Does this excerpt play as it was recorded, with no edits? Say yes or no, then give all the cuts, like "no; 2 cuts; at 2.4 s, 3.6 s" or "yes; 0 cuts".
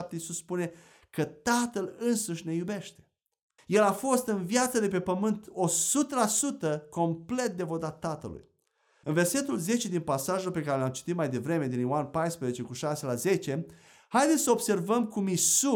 no; 2 cuts; at 3.6 s, 9.0 s